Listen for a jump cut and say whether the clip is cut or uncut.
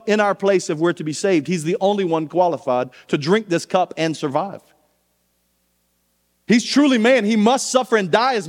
uncut